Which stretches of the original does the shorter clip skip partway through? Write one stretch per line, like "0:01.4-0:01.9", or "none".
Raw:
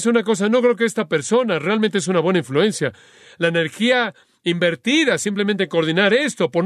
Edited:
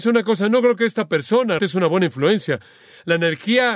0:01.6-0:01.9